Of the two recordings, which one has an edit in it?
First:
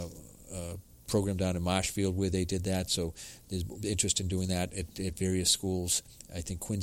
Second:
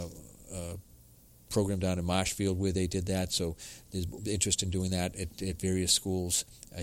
first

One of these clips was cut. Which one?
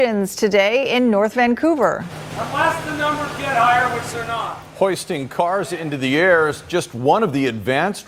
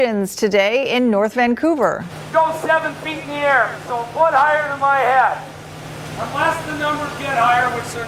first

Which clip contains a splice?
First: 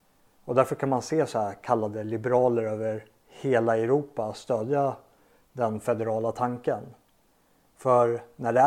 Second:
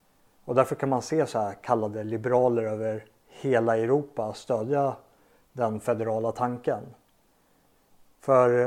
first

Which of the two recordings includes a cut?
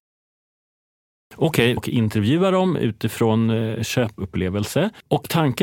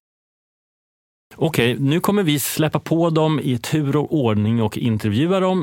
first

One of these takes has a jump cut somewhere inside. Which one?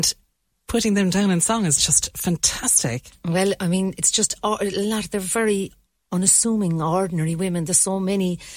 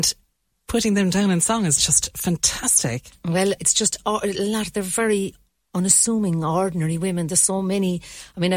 second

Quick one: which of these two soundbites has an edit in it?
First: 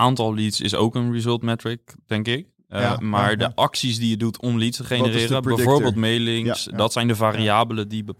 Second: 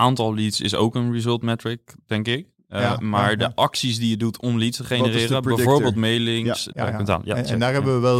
second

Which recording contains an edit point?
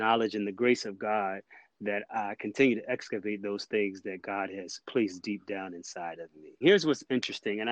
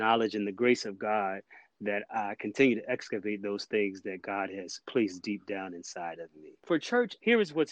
first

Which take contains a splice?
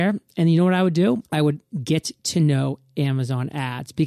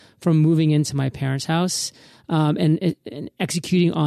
first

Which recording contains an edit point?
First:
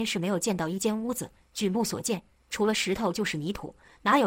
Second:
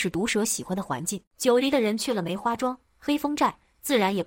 second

